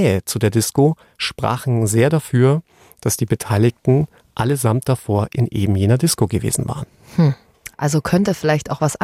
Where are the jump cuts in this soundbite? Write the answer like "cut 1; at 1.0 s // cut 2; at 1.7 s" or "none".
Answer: none